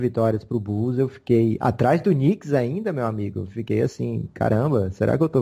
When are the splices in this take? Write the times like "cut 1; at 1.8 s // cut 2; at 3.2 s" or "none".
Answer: none